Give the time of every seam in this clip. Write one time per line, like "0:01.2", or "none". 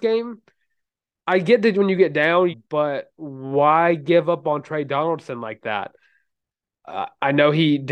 0:02.5